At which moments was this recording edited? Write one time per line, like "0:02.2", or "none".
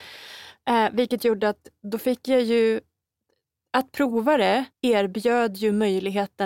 0:04.7